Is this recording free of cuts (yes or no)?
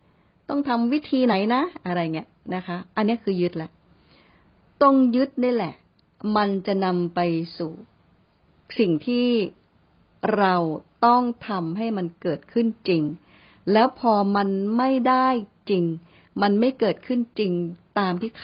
yes